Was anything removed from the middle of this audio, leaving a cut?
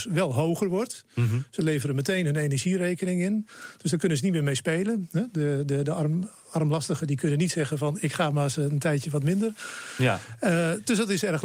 no; 0 cuts

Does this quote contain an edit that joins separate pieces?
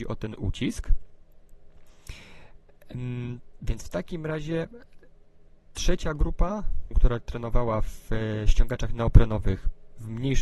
yes; 2 cuts; at 3.6 s, 6.9 s

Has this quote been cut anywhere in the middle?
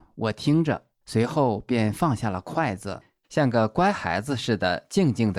no; 0 cuts

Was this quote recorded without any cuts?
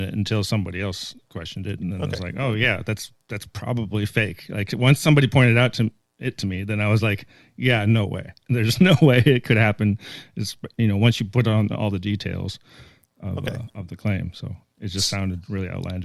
yes; 0 cuts

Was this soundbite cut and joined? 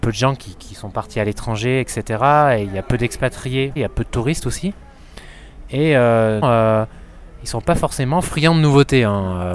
yes; 2 cuts; at 3.8 s, 6.4 s

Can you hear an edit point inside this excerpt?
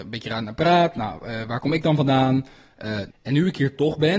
yes; 1 cut; at 3.1 s

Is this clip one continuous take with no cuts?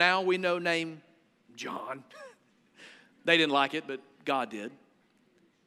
yes; 0 cuts

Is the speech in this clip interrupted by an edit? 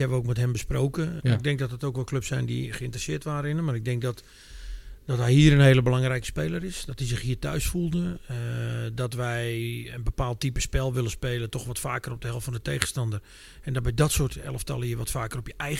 yes; 1 cut; at 1.2 s

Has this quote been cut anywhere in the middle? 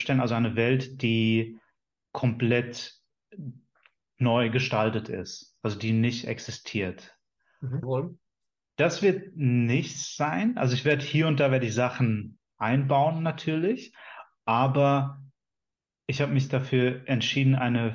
yes; 1 cut; at 7.8 s

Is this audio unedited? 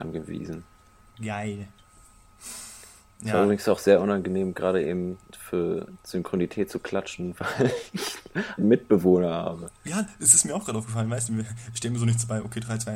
no; 1 cut; at 8.6 s

